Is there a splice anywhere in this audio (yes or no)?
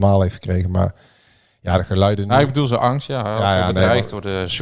no